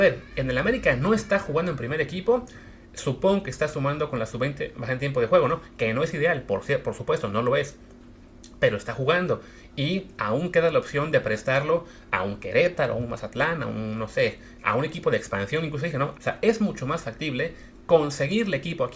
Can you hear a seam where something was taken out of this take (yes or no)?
yes